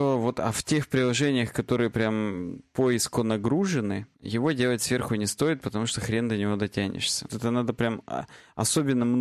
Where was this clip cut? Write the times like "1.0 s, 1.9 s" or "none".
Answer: 4.1 s, 7.3 s